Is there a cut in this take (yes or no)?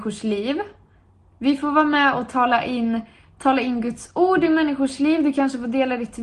no